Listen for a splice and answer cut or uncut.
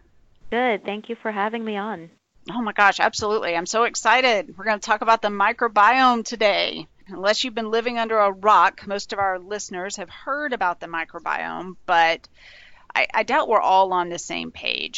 uncut